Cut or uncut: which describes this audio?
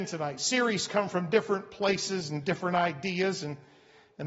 uncut